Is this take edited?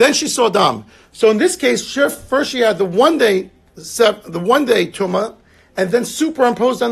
no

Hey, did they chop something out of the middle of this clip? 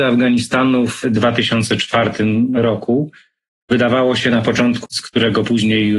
yes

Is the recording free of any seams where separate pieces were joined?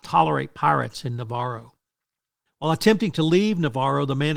no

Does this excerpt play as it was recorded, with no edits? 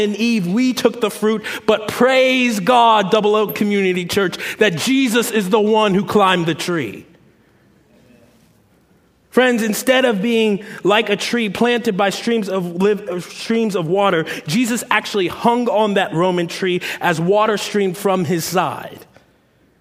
yes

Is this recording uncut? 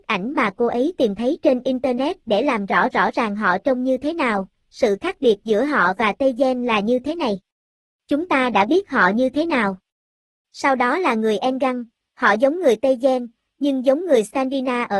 yes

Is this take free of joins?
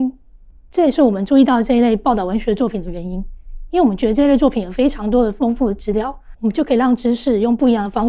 no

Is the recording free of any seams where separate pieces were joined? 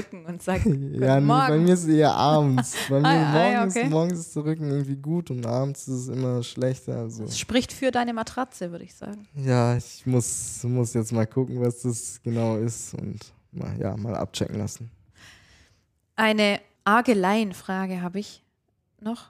yes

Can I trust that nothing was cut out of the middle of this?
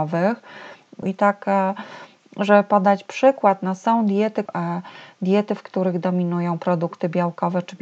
no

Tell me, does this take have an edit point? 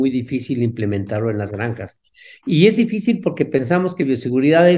no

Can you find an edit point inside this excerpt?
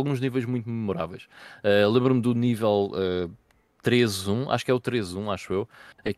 no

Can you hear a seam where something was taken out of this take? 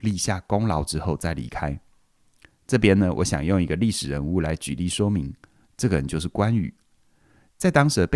no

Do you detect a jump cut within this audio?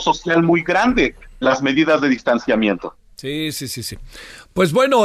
yes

